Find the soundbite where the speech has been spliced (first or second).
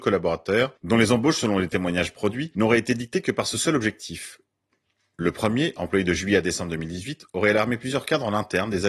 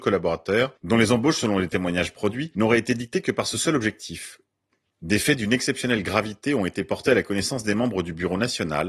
second